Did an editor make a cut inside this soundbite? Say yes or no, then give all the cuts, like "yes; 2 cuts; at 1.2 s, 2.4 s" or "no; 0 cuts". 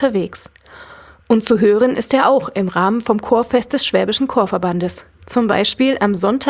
no; 0 cuts